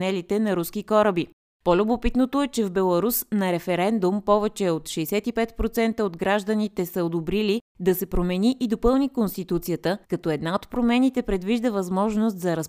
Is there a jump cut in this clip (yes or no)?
yes